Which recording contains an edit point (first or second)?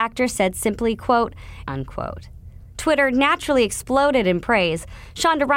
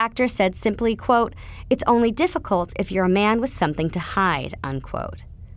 first